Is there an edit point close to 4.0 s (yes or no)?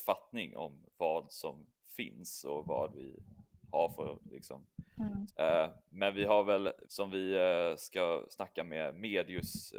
no